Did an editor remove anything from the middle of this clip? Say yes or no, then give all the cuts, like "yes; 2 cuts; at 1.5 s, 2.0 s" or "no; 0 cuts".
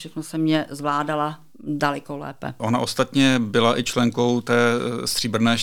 yes; 1 cut; at 2.6 s